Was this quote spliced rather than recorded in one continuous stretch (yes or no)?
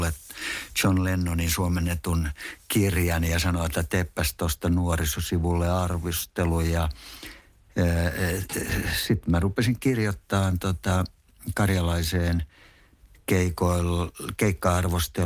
no